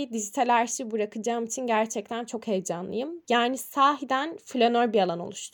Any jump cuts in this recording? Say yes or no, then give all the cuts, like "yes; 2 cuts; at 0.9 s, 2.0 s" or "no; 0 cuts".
yes; 1 cut; at 3.2 s